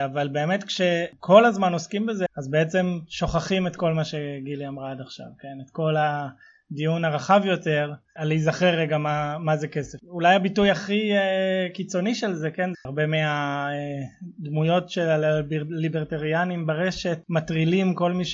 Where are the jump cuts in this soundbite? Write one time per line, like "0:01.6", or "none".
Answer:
0:02.3
0:12.7

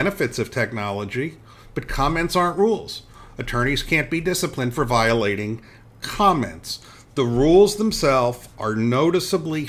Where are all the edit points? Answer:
none

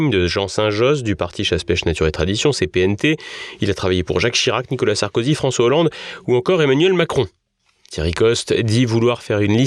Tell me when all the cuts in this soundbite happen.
none

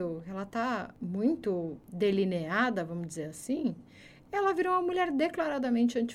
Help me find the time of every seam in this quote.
none

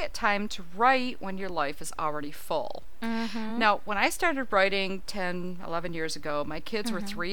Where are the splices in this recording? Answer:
none

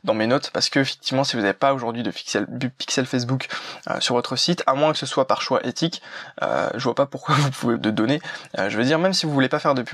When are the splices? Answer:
0:07.7

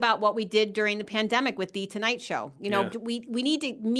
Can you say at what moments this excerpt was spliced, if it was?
0:02.9

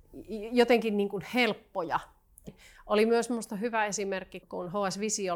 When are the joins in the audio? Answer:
0:02.5
0:04.4

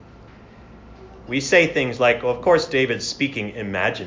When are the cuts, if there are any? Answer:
0:01.3

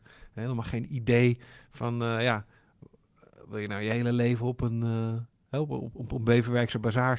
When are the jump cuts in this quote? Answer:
0:05.9

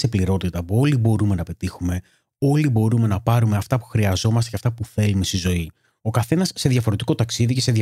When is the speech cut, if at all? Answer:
0:06.0

